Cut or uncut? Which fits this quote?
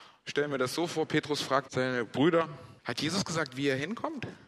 cut